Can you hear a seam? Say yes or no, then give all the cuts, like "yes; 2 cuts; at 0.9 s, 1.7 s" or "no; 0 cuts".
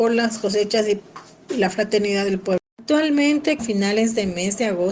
yes; 1 cut; at 3.6 s